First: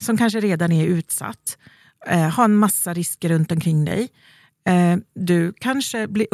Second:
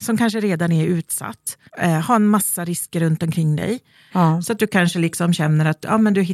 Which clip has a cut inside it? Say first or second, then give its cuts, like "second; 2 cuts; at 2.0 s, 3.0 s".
second; 2 cuts; at 1.7 s, 4.1 s